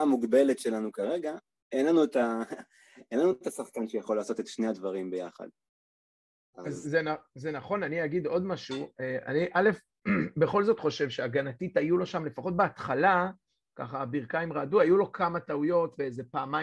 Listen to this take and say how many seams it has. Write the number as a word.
zero